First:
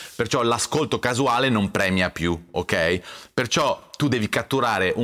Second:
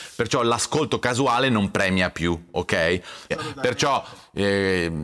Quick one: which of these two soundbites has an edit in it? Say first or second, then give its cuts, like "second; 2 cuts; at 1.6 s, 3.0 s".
second; 1 cut; at 3.3 s